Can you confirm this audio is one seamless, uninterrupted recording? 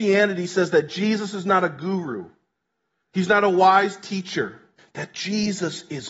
no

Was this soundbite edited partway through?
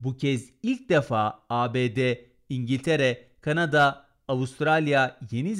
no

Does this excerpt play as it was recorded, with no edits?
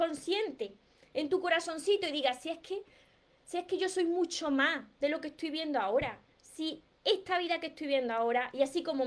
yes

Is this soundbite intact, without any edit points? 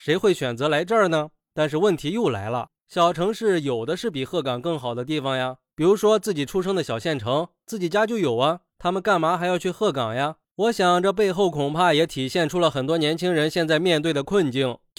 no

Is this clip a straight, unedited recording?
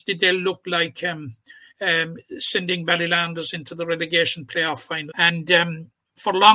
no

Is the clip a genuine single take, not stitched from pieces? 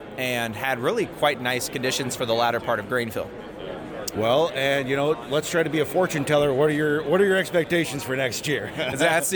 no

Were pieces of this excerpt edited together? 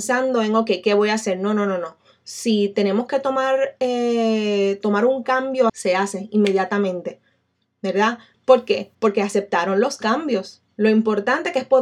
yes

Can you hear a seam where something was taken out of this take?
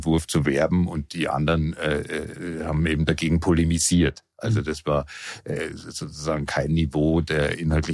no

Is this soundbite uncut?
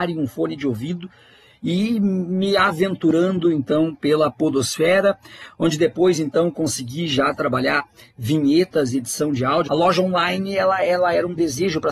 no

